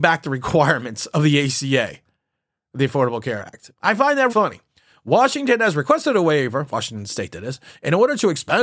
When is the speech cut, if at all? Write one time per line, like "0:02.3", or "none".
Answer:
0:04.3